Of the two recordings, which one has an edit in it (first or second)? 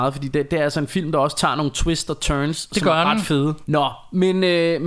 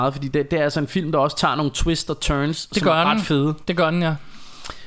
first